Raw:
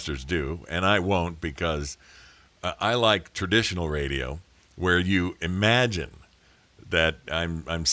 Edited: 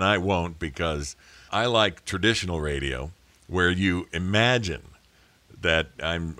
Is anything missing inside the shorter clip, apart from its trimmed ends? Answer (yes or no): yes